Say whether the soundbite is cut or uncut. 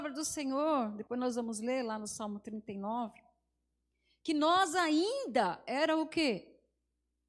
uncut